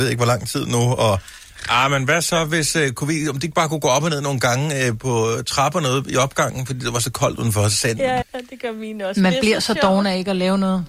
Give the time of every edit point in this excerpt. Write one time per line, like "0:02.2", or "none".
0:08.2